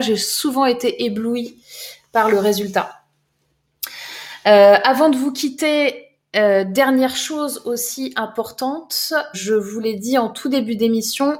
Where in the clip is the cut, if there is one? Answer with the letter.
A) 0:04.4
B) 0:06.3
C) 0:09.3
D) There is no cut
C